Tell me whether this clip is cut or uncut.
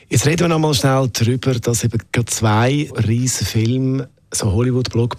cut